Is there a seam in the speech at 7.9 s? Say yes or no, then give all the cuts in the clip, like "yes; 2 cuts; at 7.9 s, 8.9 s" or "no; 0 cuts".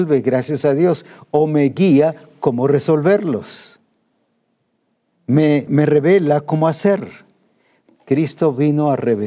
yes; 2 cuts; at 5.7 s, 7.9 s